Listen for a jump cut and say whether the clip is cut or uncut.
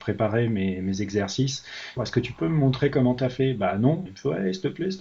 cut